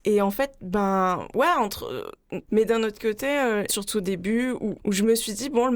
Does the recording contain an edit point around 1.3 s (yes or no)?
no